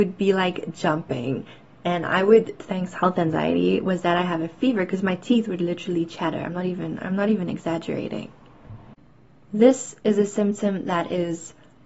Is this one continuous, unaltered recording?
no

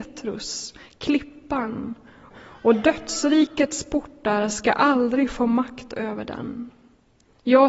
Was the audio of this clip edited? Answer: yes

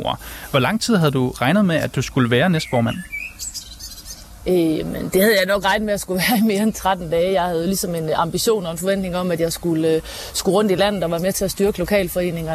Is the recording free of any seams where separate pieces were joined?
yes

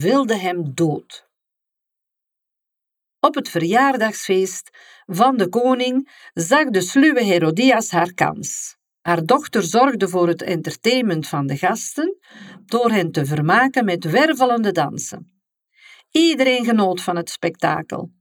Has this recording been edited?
no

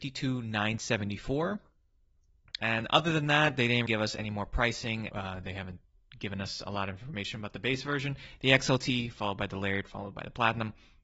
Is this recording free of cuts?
no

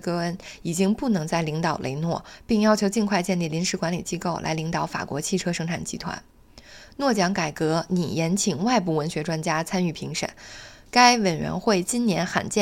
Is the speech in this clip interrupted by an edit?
yes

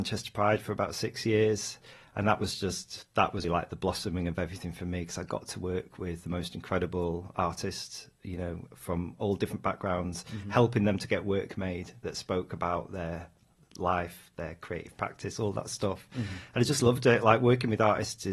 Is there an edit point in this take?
yes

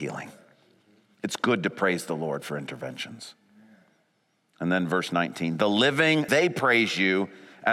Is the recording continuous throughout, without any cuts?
no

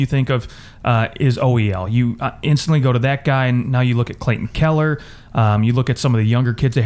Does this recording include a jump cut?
no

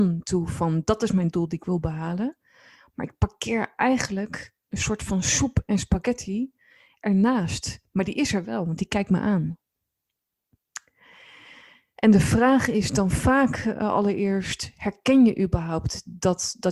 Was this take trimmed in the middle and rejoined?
no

